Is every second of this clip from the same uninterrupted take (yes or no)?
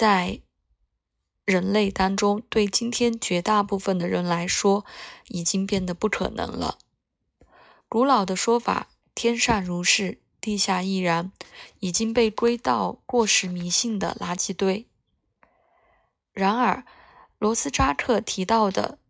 yes